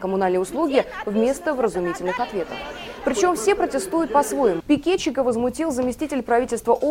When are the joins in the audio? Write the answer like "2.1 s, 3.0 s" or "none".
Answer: 4.6 s

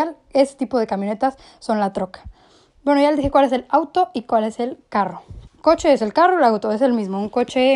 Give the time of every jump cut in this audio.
5.5 s

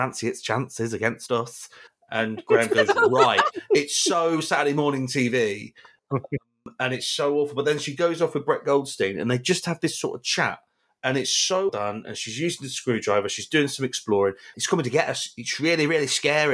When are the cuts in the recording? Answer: 11.7 s, 14.5 s

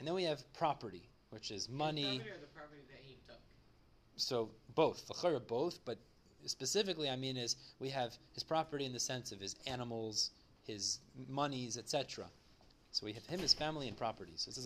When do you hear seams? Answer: none

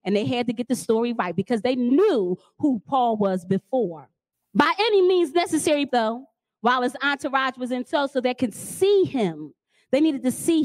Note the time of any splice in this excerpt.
4.3 s, 5.9 s

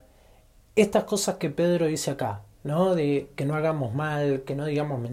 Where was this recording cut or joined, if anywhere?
none

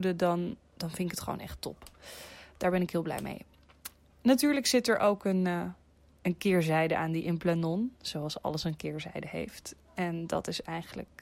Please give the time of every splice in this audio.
none

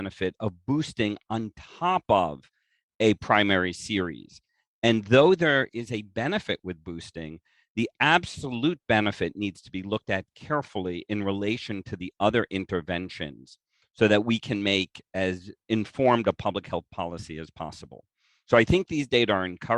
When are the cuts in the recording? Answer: none

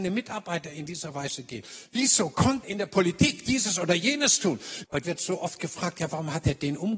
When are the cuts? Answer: 2.6 s, 4.8 s

